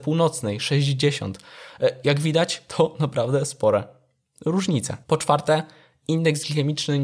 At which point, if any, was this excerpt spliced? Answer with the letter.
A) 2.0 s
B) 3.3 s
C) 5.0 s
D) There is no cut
C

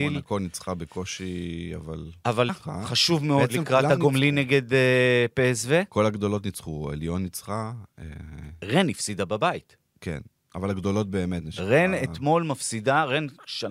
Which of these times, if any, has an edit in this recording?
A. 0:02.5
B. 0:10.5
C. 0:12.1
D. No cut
A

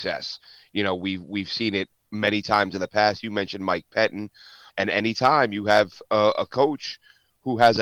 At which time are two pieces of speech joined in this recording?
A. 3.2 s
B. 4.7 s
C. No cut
B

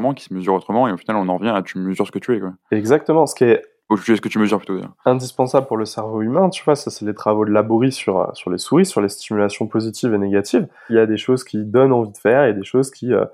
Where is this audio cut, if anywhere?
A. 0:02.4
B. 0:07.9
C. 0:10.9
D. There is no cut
C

